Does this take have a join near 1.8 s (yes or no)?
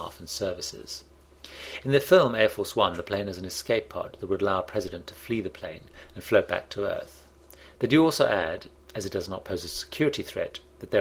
no